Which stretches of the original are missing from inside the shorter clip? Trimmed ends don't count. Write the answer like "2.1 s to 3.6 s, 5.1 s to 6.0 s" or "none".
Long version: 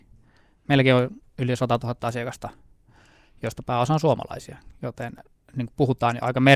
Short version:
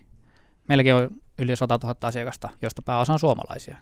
2.6 s to 3.4 s